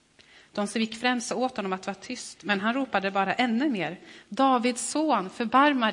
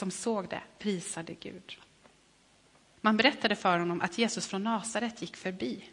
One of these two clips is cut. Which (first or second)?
second